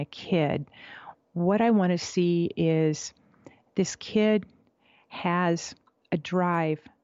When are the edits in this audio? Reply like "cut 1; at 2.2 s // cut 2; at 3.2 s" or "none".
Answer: none